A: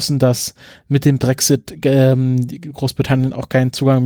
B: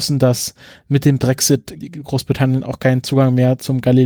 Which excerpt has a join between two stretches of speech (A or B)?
B